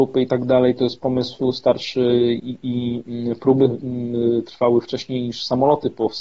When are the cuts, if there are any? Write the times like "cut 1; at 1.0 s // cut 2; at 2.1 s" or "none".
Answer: cut 1; at 2.4 s